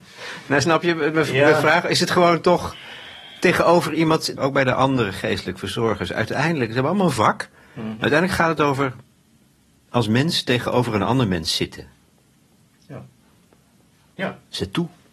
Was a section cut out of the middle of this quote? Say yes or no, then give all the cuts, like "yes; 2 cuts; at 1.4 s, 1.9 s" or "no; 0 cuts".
yes; 1 cut; at 4.4 s